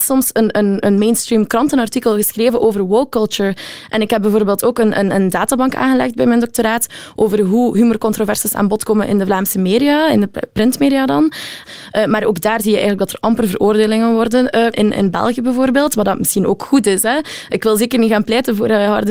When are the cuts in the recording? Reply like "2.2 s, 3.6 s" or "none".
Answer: 11.6 s, 14.7 s